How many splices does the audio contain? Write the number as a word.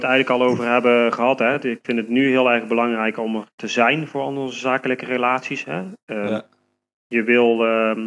zero